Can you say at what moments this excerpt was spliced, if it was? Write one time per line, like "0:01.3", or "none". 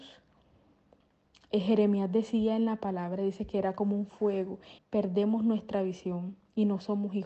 0:04.8